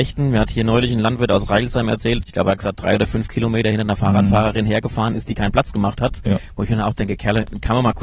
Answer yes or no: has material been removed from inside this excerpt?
yes